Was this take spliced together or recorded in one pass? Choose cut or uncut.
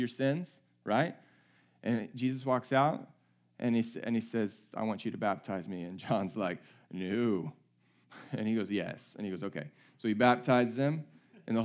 uncut